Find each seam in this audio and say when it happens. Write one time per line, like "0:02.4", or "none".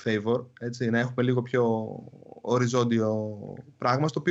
none